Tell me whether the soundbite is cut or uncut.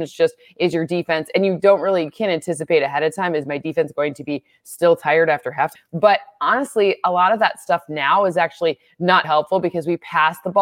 cut